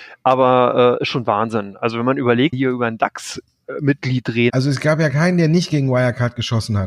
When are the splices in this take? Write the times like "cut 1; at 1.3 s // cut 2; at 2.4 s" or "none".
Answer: cut 1; at 2.5 s // cut 2; at 4.5 s